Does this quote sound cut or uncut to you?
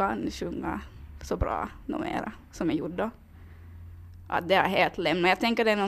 uncut